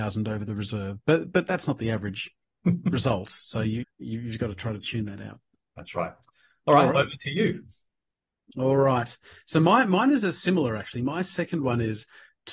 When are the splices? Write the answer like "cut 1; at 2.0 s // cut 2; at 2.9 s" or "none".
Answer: cut 1; at 3.8 s